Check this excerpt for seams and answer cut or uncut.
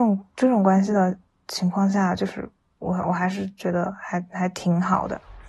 uncut